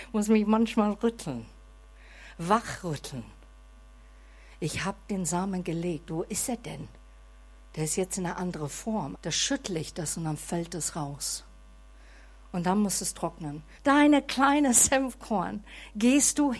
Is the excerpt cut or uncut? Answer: cut